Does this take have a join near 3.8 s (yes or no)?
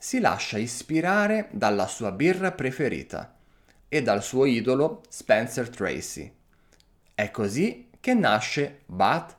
yes